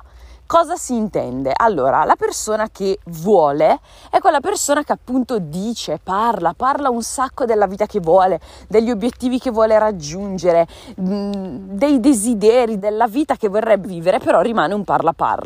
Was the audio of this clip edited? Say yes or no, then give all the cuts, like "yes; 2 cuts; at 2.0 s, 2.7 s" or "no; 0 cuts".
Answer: yes; 2 cuts; at 12.8 s, 13.8 s